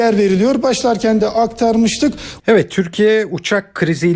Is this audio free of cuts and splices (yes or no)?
no